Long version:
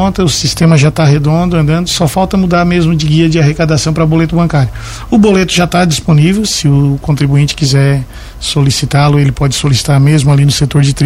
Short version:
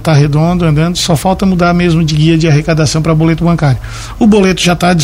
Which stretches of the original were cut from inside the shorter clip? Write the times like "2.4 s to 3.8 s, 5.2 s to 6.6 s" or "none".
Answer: none

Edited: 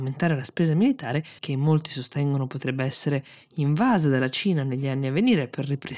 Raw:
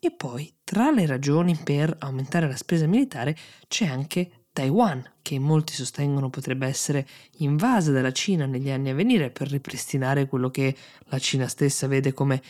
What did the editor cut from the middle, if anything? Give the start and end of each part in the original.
3.5 s to 5.2 s

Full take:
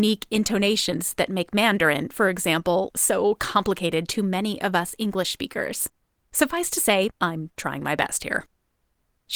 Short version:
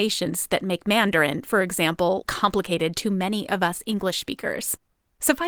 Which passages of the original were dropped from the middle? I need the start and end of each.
2.9 s to 3.4 s

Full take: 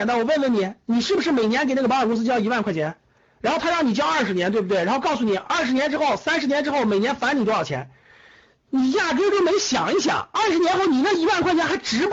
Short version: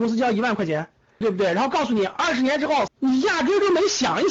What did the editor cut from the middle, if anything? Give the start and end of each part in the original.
3.3 s to 4.5 s, 6.2 s to 8.6 s

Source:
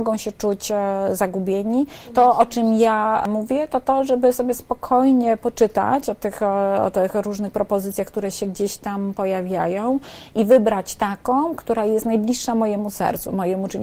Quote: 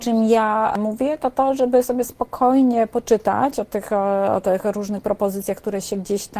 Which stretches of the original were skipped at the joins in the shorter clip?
none

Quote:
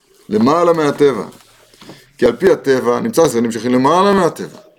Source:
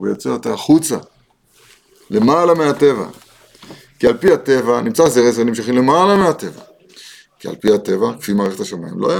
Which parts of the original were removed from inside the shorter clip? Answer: 5.1 s to 5.3 s

